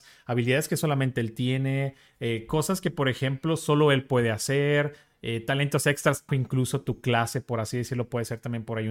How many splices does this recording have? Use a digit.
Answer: 1